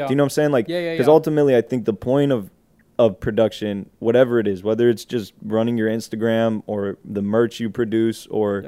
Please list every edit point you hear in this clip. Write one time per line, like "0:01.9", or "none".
none